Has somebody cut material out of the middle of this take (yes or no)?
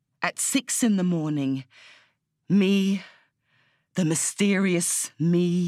no